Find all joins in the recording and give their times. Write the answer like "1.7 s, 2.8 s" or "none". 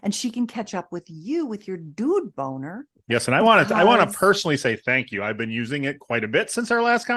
none